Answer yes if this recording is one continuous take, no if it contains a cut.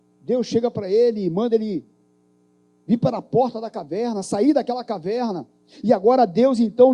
yes